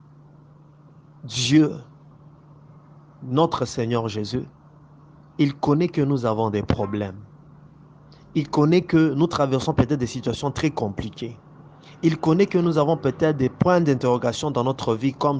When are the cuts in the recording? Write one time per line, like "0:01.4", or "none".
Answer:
none